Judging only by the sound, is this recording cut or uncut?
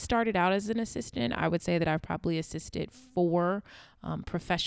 uncut